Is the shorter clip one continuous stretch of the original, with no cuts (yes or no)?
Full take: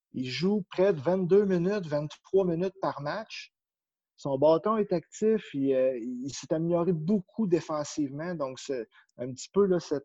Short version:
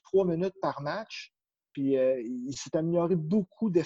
no